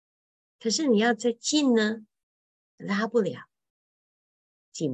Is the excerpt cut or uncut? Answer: uncut